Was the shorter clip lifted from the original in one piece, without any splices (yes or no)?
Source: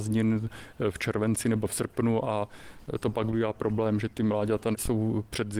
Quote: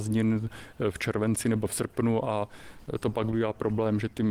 yes